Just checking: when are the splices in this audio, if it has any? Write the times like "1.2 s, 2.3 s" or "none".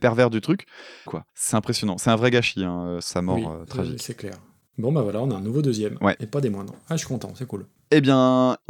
1.1 s